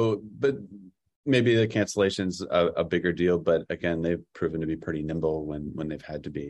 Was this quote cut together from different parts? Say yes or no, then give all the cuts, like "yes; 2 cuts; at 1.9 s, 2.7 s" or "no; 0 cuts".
yes; 1 cut; at 3.7 s